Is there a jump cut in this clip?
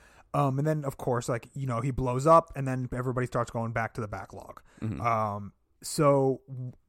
no; 0 cuts

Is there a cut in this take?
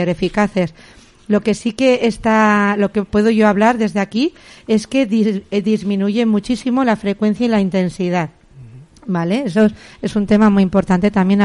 no; 0 cuts

